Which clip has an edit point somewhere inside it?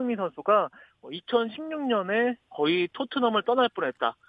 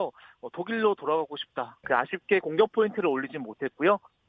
second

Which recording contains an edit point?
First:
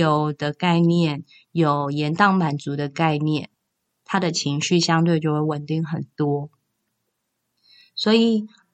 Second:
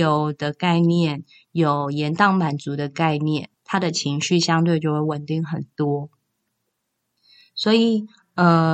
second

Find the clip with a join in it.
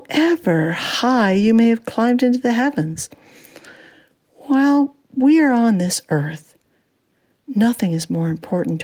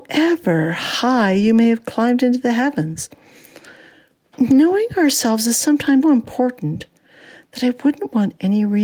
second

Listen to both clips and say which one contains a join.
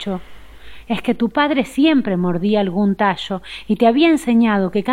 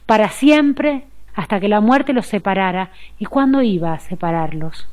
second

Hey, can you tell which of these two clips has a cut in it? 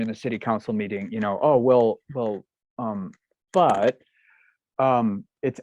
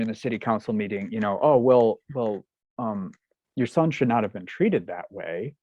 first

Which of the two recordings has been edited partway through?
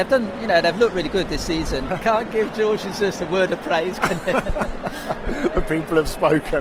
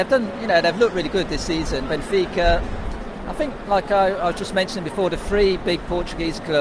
first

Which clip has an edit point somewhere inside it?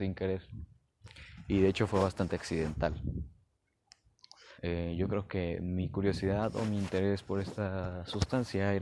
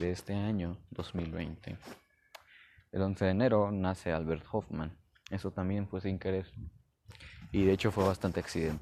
first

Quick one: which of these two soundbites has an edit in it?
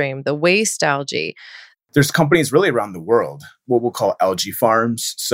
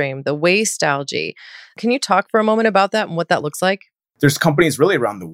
first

